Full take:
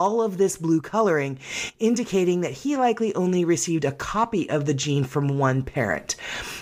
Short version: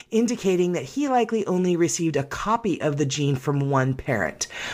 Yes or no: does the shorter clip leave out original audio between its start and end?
no